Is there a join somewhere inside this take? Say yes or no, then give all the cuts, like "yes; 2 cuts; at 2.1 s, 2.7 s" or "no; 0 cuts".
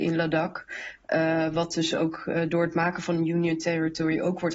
no; 0 cuts